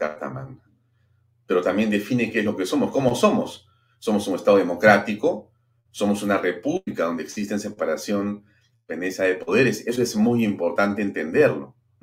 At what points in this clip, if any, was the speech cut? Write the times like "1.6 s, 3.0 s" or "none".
none